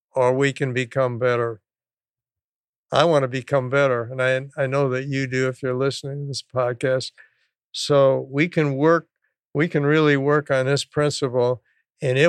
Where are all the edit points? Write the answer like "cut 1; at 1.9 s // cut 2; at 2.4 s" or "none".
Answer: none